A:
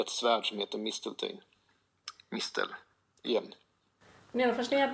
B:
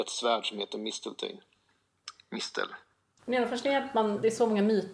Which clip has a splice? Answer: B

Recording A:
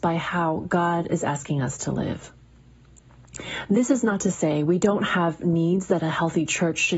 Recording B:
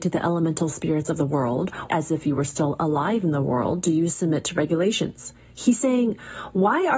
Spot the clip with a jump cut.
B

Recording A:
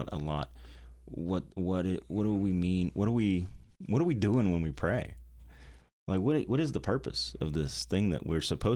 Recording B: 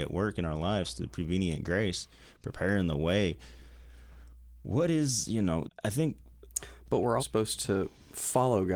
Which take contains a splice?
B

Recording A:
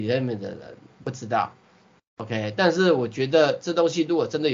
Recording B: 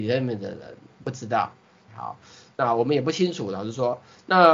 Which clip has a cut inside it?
B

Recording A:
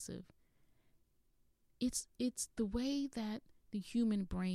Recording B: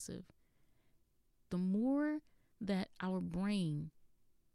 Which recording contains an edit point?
B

